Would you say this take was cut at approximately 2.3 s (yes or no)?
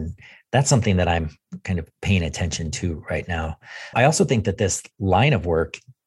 no